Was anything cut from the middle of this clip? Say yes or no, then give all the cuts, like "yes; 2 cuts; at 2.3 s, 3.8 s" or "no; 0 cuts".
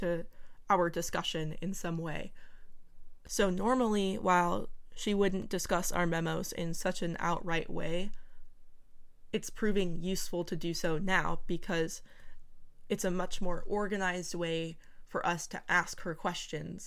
no; 0 cuts